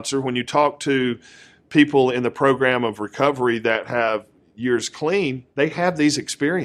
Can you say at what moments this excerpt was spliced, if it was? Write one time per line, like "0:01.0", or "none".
0:05.5